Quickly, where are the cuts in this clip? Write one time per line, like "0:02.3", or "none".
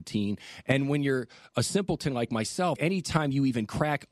0:01.5
0:02.8